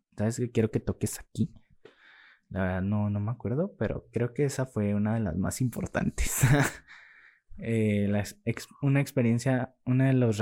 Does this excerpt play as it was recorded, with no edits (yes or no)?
yes